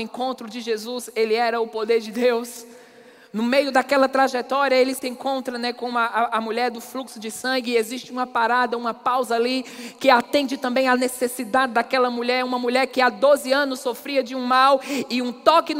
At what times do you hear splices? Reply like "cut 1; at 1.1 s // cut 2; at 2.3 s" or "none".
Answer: none